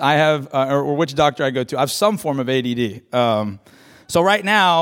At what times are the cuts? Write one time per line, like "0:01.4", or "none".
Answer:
none